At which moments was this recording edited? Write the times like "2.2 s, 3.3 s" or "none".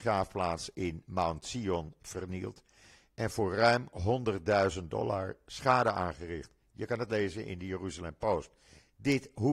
none